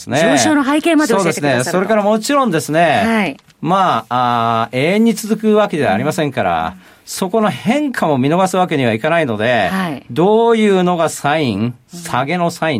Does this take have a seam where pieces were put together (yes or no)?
no